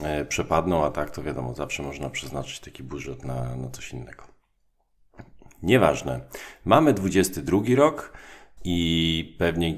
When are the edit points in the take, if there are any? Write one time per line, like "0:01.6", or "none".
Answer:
0:08.6